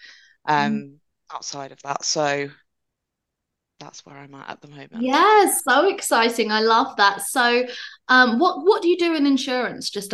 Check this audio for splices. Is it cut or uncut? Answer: uncut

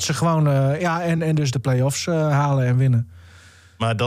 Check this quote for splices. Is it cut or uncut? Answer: uncut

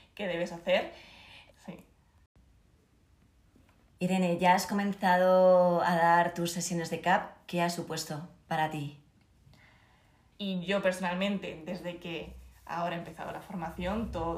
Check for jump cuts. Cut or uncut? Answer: cut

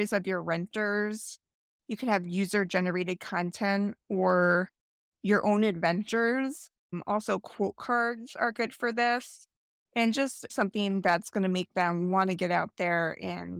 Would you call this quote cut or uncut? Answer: cut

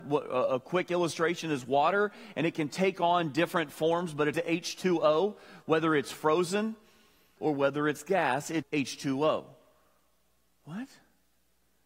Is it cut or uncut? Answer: cut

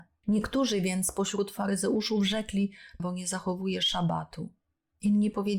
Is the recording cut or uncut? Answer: cut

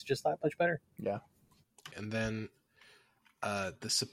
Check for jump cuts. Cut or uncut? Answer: cut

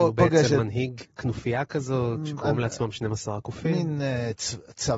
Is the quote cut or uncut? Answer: cut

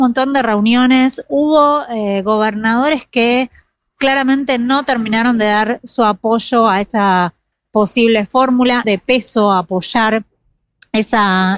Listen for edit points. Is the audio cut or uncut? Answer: cut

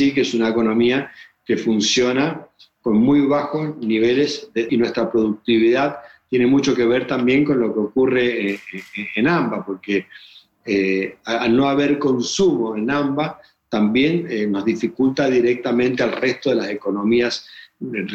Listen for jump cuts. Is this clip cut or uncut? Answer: cut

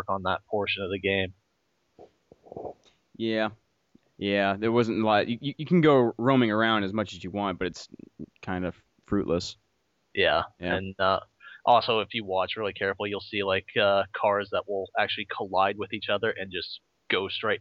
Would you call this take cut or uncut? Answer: uncut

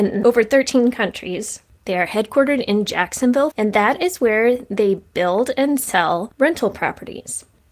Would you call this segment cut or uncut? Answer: cut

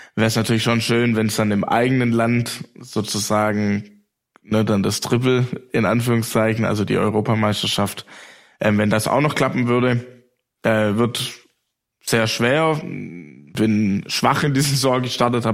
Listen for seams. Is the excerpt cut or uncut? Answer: uncut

